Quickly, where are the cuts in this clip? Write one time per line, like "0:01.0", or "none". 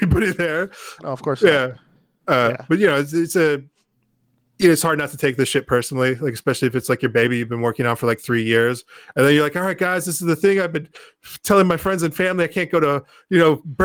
0:01.0